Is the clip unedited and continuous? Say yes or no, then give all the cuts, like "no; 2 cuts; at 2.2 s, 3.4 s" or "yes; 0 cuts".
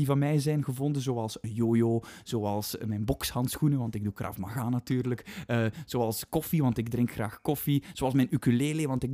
yes; 0 cuts